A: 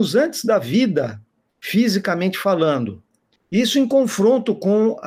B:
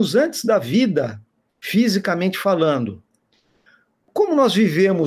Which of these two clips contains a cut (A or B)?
A